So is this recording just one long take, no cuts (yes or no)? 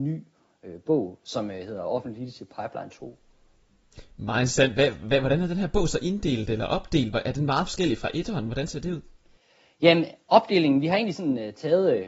yes